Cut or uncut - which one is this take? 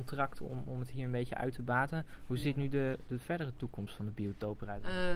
uncut